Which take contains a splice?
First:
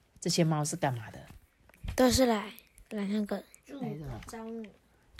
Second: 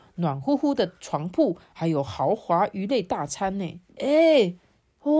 second; 1 cut; at 3.9 s

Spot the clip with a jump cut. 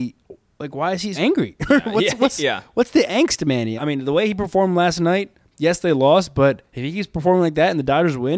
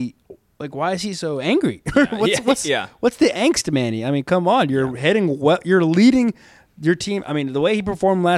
first; 2 cuts; at 1.1 s, 3.8 s

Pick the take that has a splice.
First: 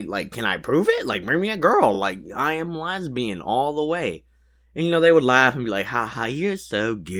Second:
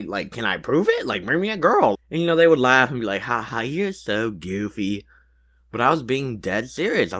second; 1 cut; at 1.9 s

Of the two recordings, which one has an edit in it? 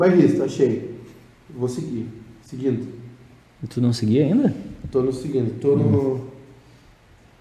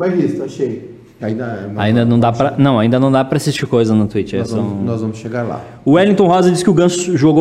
second; 1 cut; at 1.2 s

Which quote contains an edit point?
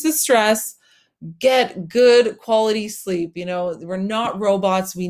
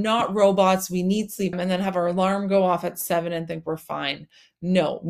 second; 1 cut; at 1.5 s

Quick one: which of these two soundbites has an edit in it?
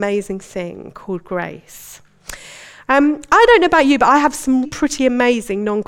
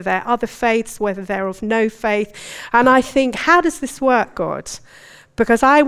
first; 1 cut; at 4.6 s

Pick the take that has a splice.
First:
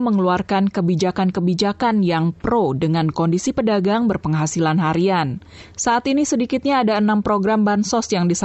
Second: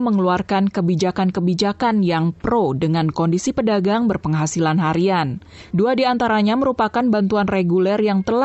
second; 1 cut; at 5.7 s

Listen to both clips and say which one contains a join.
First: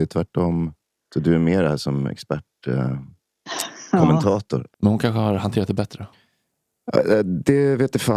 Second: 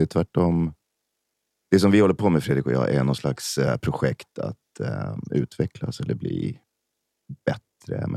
first; 2 cuts; at 1.0 s, 4.7 s

